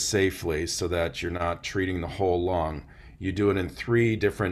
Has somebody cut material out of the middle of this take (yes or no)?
no